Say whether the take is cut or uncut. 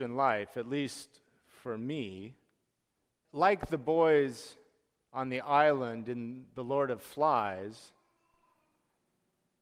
cut